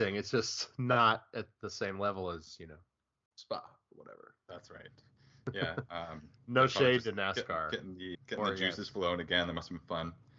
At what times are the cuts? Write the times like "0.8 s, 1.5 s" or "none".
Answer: 8.1 s